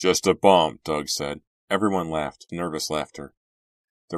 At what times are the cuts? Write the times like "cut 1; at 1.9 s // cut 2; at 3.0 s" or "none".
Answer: cut 1; at 2.5 s

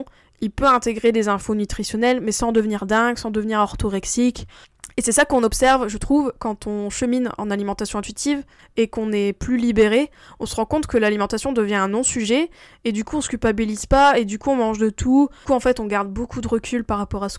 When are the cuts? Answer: none

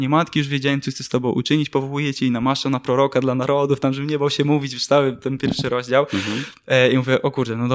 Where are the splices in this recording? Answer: none

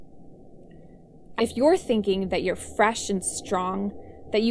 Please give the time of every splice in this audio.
cut 1; at 1.4 s

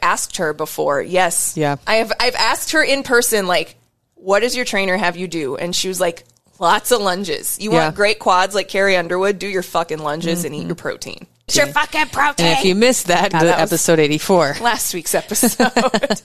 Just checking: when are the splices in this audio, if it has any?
cut 1; at 11.5 s // cut 2; at 13.3 s

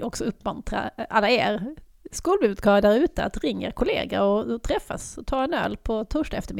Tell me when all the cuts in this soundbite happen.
none

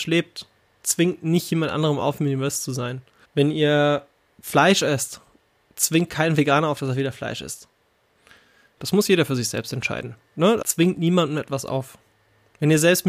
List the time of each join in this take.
cut 1; at 3.2 s // cut 2; at 8.8 s // cut 3; at 10.6 s

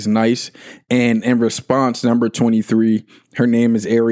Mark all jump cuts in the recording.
none

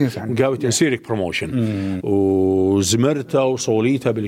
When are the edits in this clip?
cut 1; at 2.0 s

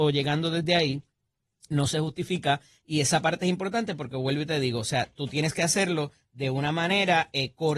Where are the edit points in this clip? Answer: cut 1; at 1.7 s

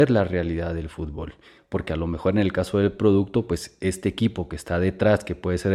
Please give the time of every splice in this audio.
cut 1; at 1.6 s

